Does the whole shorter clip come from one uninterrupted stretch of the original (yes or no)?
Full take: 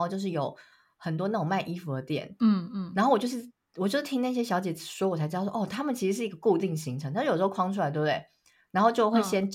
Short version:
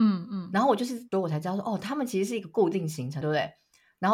no